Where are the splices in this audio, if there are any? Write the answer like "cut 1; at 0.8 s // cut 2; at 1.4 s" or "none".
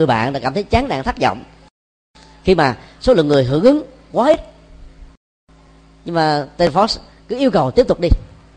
none

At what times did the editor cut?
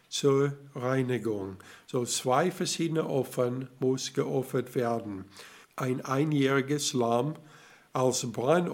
cut 1; at 5.6 s

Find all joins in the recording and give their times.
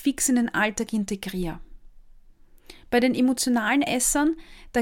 none

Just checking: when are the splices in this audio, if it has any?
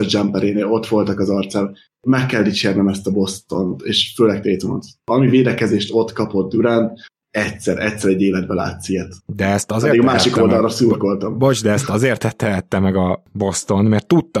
cut 1; at 9.2 s

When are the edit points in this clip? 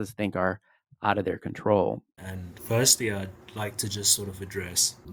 cut 1; at 2.2 s

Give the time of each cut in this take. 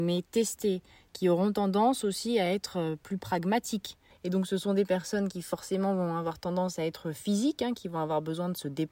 none

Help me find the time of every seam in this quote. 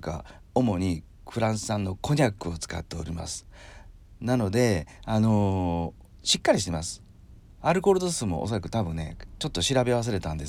cut 1; at 7.6 s

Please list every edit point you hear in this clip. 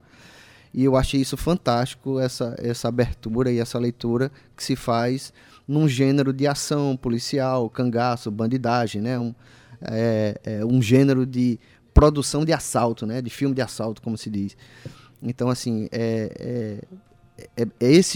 none

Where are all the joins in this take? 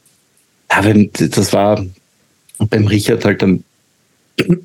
none

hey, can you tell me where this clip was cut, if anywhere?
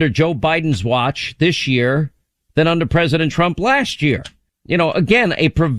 cut 1; at 4.5 s

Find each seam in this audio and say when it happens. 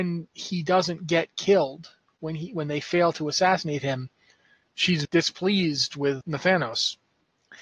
cut 1; at 5.0 s // cut 2; at 6.2 s

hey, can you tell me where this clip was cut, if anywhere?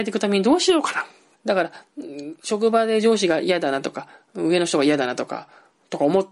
cut 1; at 1.3 s

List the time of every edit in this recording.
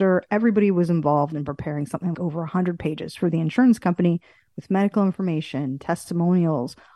cut 1; at 2.1 s

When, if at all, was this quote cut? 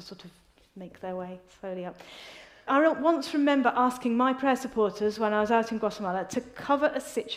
cut 1; at 2.7 s

